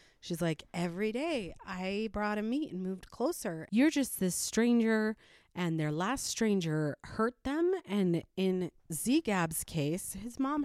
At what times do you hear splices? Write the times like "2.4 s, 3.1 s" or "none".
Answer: 3.7 s